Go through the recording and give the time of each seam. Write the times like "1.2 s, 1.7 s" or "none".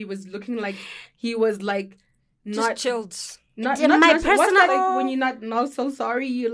4.7 s